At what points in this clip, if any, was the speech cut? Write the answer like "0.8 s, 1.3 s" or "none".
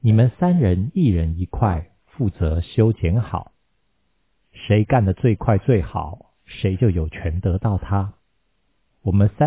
none